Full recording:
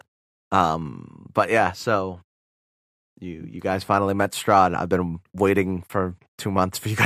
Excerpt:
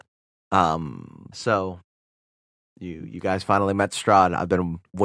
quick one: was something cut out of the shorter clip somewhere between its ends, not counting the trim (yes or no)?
yes